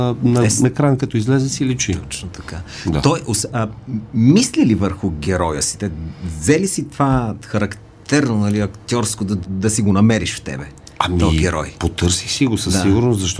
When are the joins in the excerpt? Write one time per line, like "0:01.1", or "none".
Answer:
0:09.4